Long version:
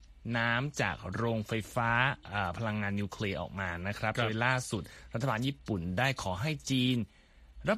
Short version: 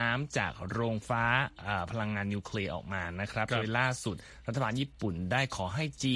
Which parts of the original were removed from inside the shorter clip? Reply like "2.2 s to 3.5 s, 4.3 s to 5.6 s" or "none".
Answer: 1.5 s to 1.7 s